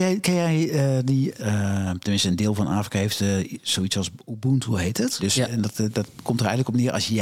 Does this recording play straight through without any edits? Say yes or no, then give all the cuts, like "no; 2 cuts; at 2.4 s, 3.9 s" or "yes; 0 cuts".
no; 2 cuts; at 1.4 s, 5.2 s